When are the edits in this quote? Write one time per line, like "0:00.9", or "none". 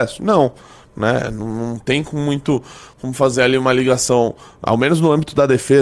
none